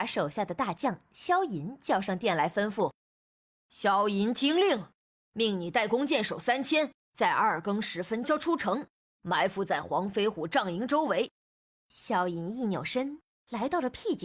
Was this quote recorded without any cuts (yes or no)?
no